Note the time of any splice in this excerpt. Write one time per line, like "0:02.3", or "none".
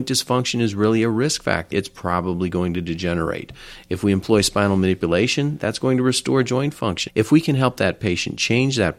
0:01.7
0:07.1